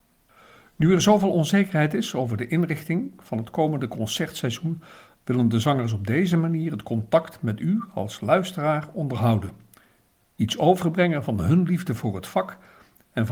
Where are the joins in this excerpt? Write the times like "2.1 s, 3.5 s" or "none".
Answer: none